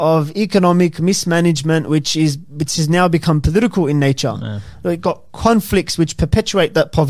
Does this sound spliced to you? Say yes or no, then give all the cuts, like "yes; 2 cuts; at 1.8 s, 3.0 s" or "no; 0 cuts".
no; 0 cuts